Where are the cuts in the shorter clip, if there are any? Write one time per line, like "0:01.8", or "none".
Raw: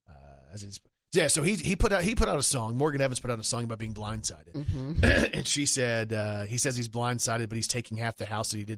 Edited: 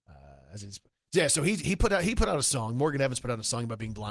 none